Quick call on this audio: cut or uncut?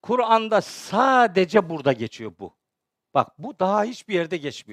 uncut